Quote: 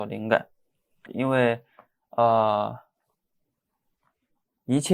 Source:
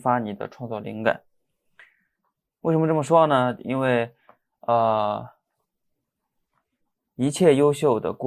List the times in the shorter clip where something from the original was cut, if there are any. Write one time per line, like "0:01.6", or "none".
0:01.1

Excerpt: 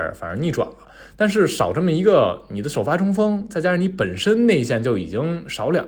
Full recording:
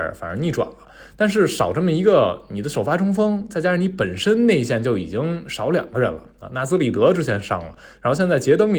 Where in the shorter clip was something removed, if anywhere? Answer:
none

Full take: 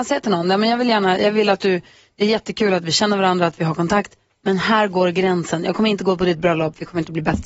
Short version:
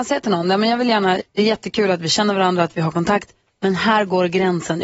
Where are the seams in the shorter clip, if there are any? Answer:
0:01.2

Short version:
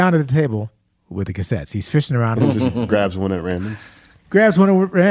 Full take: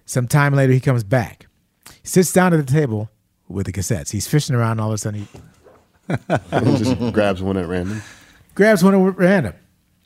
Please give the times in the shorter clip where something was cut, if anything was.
0:02.4

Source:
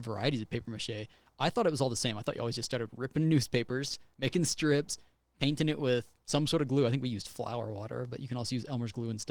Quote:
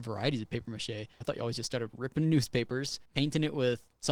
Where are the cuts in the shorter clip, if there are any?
0:01.2
0:03.1

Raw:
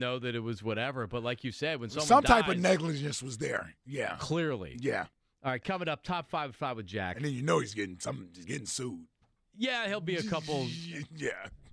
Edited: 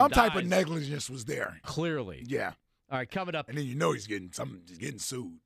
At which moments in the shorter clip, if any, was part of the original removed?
0:01.6
0:03.5

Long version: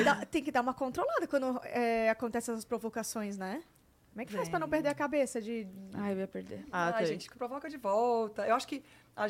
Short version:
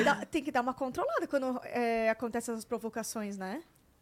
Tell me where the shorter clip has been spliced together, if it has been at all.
none

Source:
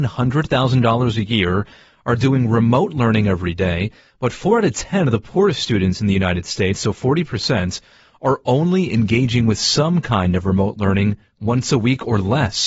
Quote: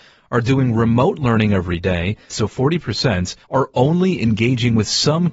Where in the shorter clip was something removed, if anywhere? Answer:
0:02.3
0:03.4

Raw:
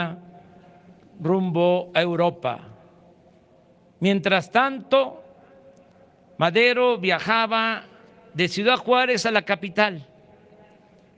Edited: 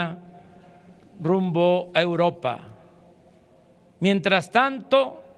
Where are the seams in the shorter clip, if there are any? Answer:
none

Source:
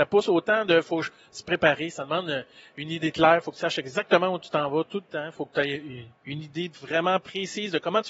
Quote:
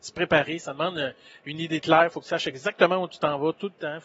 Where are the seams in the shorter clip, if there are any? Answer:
none

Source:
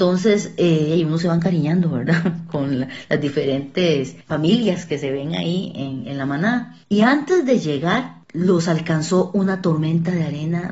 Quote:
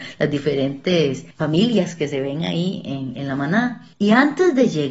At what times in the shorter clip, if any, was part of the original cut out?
none

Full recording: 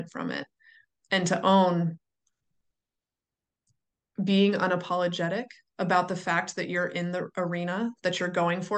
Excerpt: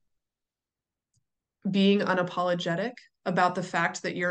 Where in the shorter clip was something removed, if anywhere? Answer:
none

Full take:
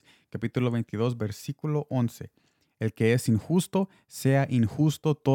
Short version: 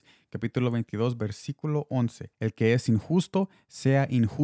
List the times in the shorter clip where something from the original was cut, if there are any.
0:02.3

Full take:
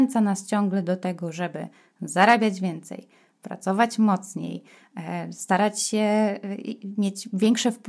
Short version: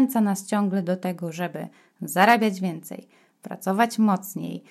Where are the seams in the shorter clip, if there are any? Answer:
none

